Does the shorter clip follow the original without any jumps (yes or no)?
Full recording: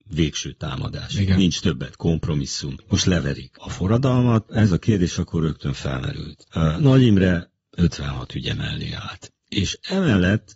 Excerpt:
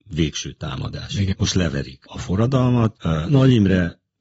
no